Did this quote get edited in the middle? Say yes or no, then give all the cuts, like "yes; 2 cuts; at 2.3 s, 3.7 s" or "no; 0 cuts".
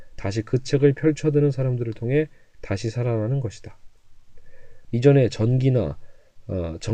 yes; 1 cut; at 4.8 s